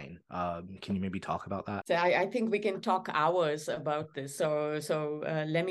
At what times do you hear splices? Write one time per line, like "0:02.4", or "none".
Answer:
0:01.8